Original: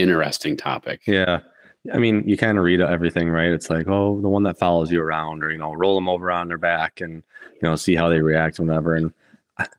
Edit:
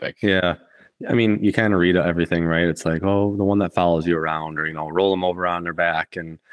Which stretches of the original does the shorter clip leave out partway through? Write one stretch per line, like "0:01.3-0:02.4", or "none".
none